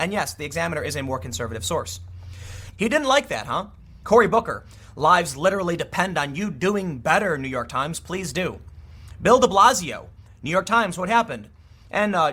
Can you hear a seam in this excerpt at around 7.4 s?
no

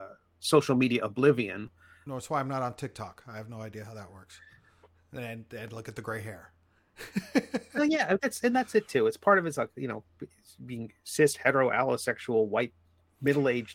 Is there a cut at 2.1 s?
yes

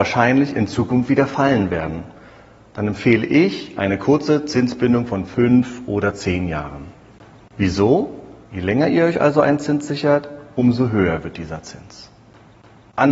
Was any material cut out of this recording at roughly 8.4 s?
yes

